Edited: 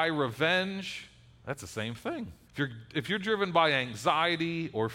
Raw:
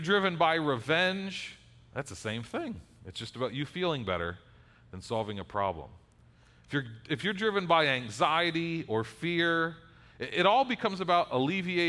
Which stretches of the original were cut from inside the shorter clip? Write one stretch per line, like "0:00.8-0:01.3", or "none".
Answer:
0:02.9-0:06.6